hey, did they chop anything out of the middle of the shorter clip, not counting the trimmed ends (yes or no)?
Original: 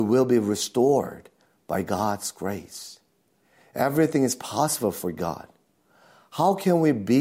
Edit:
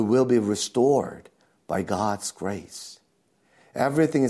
no